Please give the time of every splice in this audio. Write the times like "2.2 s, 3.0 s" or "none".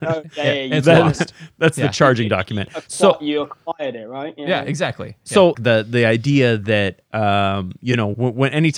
5.5 s